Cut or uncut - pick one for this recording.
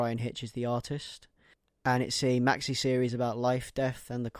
uncut